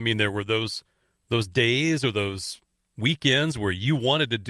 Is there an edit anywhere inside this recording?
no; 0 cuts

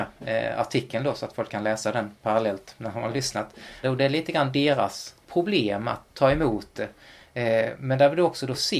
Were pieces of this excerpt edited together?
yes; 2 cuts; at 3.8 s, 5.2 s

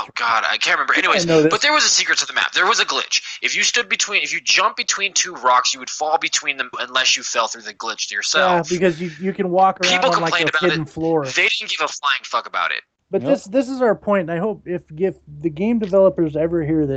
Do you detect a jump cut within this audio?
yes; 1 cut; at 6.7 s

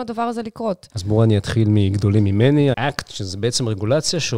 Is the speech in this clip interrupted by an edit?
yes; 1 cut; at 2.7 s

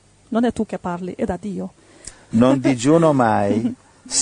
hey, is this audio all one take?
no; 1 cut; at 2.3 s

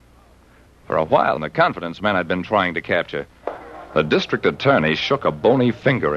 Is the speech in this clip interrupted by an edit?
yes; 2 cuts; at 1.4 s, 3.9 s

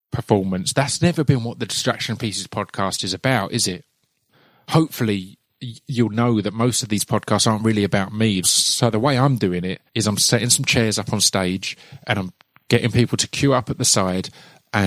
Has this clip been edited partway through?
yes; 2 cuts; at 8.4 s, 9.9 s

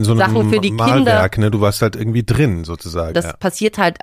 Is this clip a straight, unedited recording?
no; 1 cut; at 3.1 s

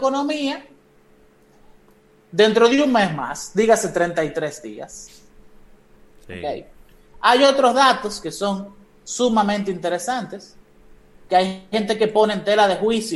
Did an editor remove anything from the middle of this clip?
yes; 1 cut; at 6.1 s

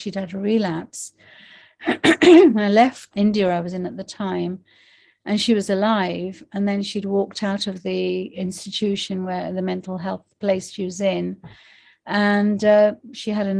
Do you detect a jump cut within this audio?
yes; 1 cut; at 3.1 s

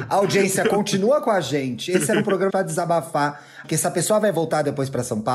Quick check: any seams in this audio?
yes; 2 cuts; at 2.5 s, 3.6 s

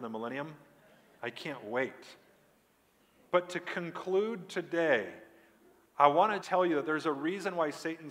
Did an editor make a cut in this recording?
yes; 1 cut; at 6.4 s

